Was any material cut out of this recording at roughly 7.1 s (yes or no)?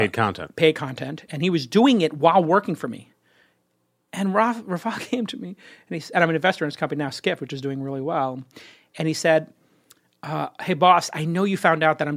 no